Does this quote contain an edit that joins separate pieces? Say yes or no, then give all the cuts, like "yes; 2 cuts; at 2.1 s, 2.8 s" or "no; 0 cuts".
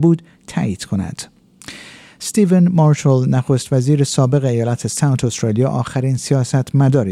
no; 0 cuts